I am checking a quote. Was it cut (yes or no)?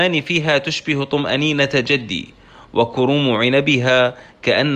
no